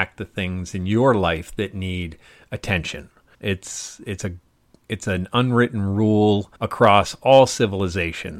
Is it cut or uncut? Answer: cut